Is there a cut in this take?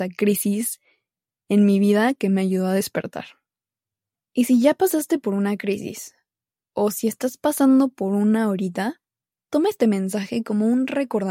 no; 0 cuts

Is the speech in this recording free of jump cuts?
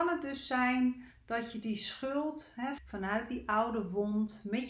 no; 1 cut; at 2.8 s

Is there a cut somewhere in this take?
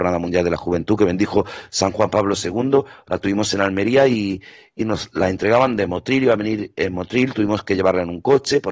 no; 0 cuts

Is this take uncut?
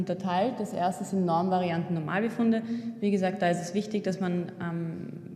yes; 0 cuts

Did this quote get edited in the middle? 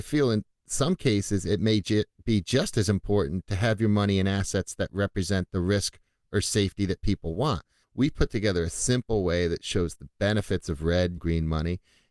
yes; 2 cuts; at 7.8 s, 11.2 s

